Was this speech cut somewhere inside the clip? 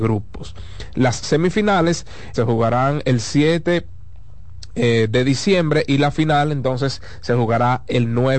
yes; 1 cut; at 2.3 s

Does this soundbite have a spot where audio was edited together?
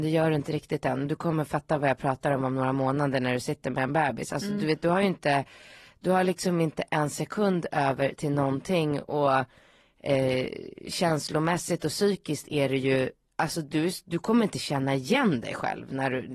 no; 0 cuts

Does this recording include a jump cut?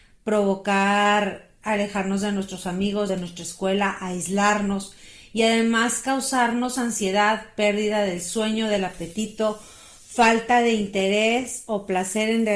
yes; 1 cut; at 3.1 s

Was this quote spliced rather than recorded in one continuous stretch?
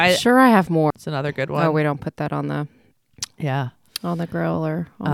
yes; 1 cut; at 0.9 s

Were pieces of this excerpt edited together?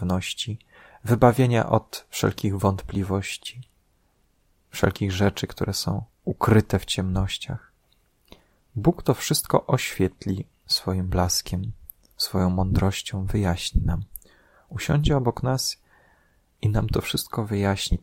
no; 0 cuts

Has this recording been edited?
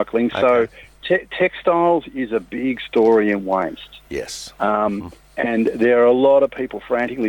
no; 0 cuts

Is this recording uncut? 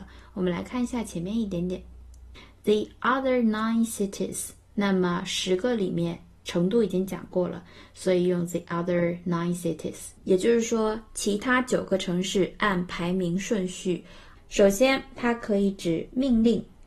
no; 2 cuts; at 10.2 s, 14.4 s

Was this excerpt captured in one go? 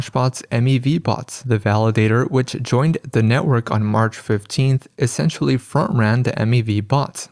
yes; 0 cuts

